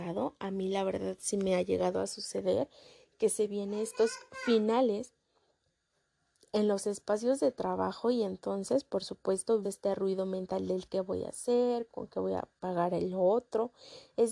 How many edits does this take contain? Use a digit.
2